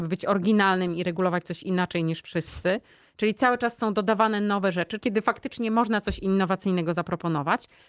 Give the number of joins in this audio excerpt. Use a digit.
2